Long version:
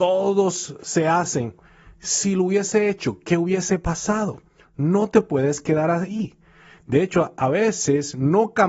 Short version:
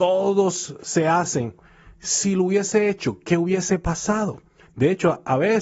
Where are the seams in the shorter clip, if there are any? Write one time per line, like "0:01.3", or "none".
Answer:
0:04.6